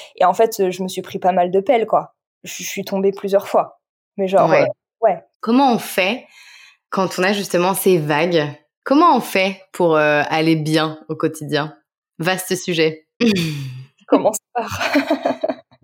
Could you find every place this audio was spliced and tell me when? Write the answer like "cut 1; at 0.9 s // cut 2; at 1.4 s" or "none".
cut 1; at 5.3 s // cut 2; at 13.2 s